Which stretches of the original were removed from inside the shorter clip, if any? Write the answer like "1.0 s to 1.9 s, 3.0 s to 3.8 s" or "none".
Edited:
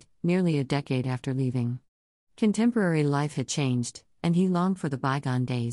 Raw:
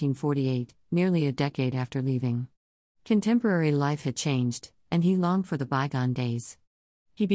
none